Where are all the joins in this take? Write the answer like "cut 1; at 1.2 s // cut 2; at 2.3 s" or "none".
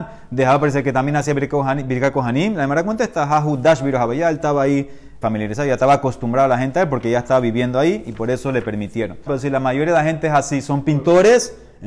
cut 1; at 5.2 s // cut 2; at 9.3 s